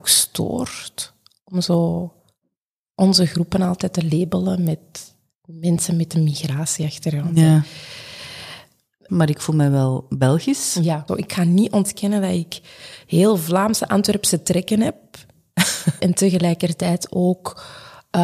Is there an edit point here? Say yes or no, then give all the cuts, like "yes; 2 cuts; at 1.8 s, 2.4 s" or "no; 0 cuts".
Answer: yes; 3 cuts; at 9.1 s, 11.1 s, 16.0 s